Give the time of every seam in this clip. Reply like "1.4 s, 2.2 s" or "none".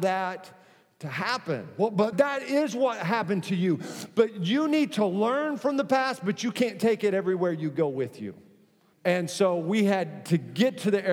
2.1 s, 8.9 s